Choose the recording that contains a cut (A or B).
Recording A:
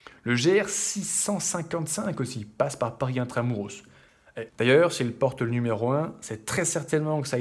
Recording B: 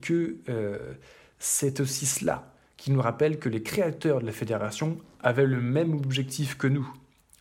A